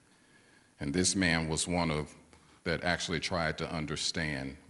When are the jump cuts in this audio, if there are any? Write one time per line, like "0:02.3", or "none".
0:02.6